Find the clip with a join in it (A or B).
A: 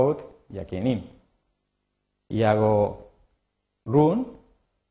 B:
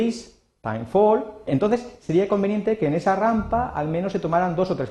B